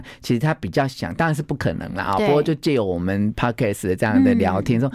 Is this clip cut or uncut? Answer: uncut